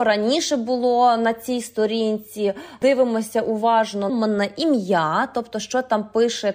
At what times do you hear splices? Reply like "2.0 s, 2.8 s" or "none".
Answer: 4.1 s